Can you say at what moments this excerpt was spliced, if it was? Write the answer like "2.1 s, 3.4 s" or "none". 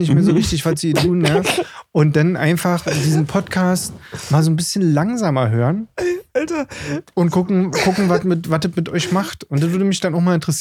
none

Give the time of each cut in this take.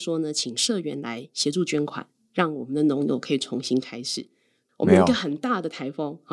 4.6 s

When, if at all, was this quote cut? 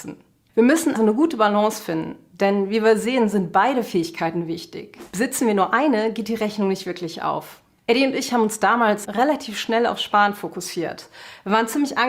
0.9 s, 9.0 s

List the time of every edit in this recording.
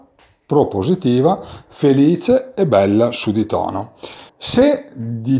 4.3 s

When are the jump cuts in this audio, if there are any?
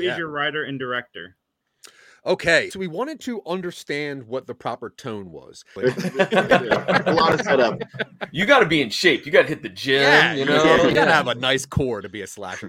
2.7 s, 5.8 s

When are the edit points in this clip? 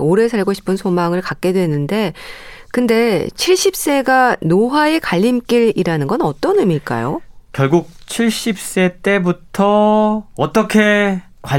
none

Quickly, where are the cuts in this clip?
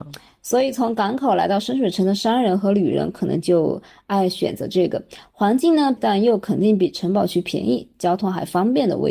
6.0 s

